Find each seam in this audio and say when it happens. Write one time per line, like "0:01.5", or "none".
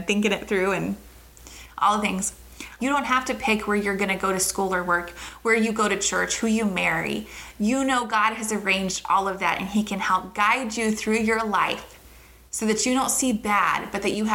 0:02.8

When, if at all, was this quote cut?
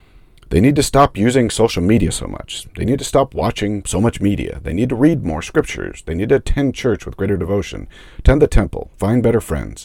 0:08.9

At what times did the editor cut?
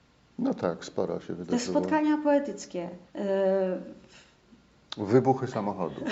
0:03.1

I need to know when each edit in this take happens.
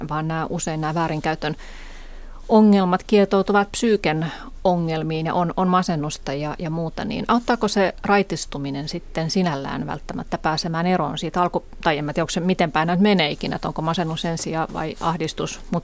none

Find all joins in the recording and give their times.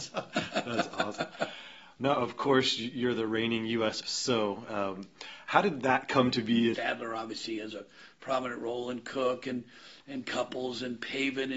0:04.0
0:06.7

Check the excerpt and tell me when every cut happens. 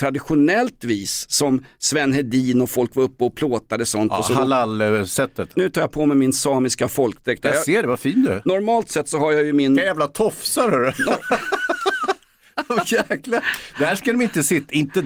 0:05.5

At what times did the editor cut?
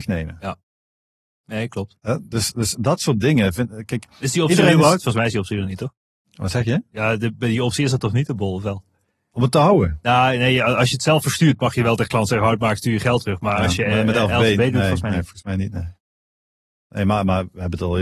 none

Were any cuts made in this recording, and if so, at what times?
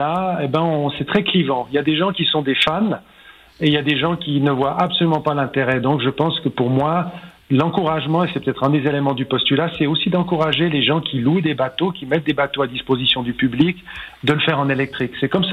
none

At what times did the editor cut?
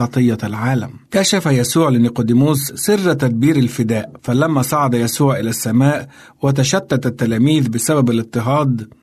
0:01.1
0:04.2

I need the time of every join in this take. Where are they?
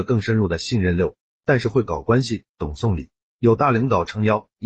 0:01.3

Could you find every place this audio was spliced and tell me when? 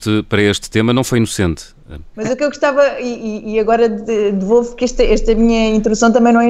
0:02.1

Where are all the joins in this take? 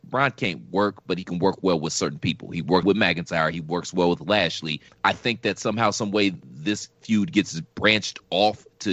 0:02.8
0:04.9

